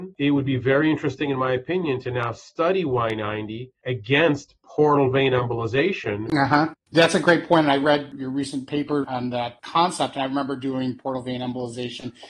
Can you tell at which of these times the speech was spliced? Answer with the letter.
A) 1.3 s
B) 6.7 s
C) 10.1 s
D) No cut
B